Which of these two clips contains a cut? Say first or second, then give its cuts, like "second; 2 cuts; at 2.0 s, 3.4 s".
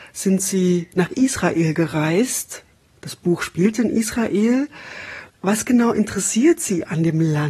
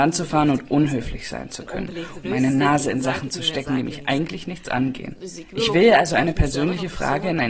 second; 1 cut; at 2.2 s